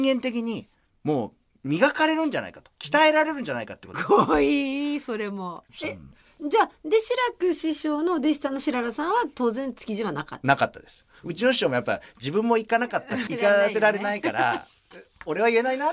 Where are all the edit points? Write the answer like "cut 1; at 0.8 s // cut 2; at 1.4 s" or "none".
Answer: cut 1; at 3.9 s // cut 2; at 13.3 s